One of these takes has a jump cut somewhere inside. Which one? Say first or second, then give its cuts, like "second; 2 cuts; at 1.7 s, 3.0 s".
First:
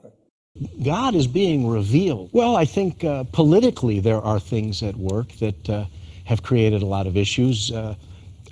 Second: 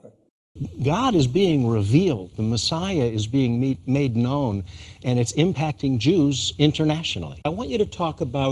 first; 1 cut; at 2.3 s